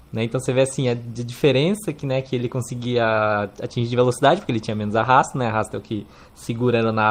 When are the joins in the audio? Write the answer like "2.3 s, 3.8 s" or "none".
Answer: none